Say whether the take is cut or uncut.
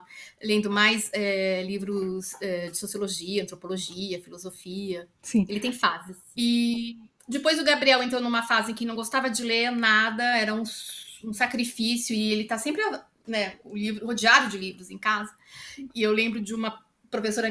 cut